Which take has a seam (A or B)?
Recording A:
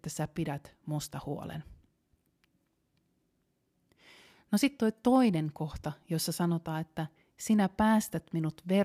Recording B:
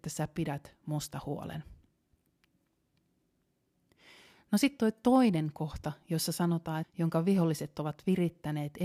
B